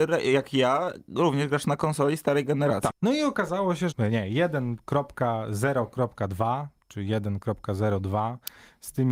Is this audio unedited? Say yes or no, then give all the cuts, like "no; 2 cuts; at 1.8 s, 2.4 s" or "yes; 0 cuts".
no; 2 cuts; at 2.9 s, 3.9 s